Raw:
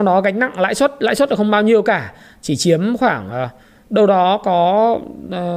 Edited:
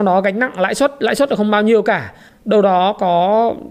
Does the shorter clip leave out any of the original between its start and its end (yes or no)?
yes